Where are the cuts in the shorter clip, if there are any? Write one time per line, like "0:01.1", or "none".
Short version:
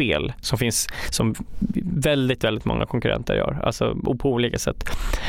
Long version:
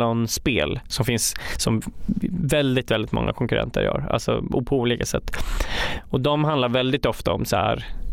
none